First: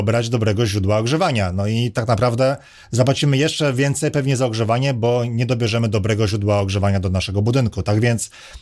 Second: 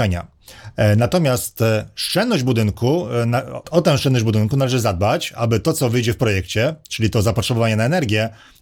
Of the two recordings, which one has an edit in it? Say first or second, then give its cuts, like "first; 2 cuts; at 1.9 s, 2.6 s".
second; 1 cut; at 3.6 s